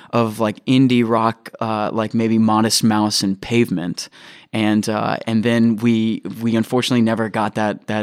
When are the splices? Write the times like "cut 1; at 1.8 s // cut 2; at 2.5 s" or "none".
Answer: none